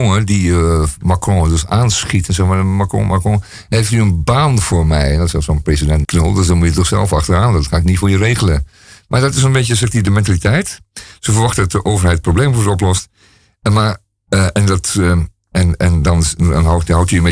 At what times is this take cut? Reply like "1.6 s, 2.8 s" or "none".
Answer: 6.0 s